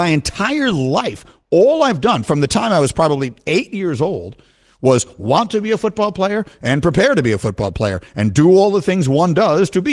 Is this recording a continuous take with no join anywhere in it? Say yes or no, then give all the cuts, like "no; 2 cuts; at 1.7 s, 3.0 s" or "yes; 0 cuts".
yes; 0 cuts